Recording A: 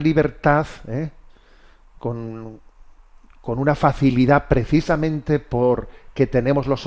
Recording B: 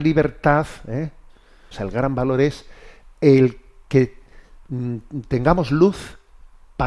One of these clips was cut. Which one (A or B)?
B